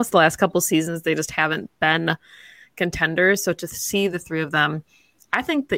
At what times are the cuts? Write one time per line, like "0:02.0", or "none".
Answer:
none

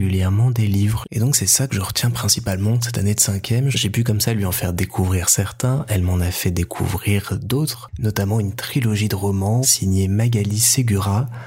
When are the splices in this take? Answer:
0:01.0
0:03.7
0:09.6

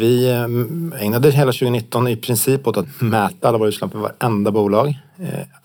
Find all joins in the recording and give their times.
none

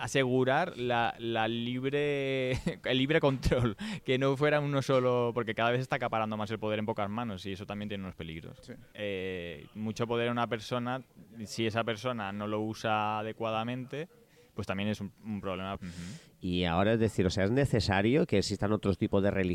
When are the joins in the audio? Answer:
0:08.9
0:15.7

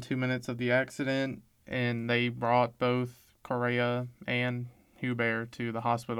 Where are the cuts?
none

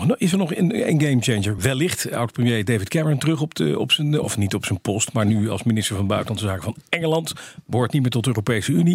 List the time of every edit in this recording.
none

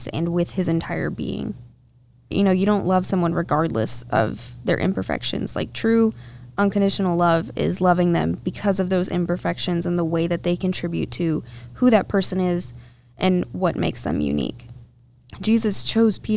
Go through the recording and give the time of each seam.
0:02.3

